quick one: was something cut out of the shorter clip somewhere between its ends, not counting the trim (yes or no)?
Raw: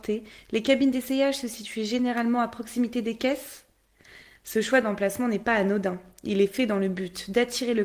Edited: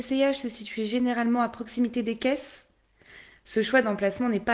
no